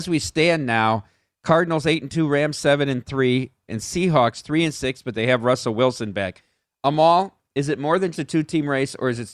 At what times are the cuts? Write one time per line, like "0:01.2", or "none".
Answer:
0:03.7
0:08.1